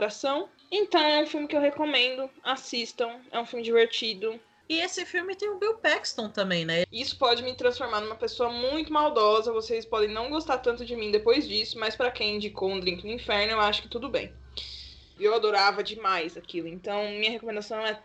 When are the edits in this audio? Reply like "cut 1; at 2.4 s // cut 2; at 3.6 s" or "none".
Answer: cut 1; at 4.6 s // cut 2; at 6.8 s // cut 3; at 15.2 s